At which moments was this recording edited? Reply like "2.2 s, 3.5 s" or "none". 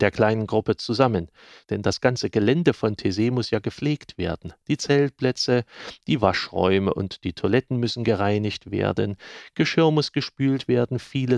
1.6 s